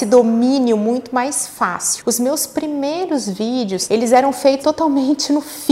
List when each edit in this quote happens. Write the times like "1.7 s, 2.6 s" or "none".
2.0 s, 4.6 s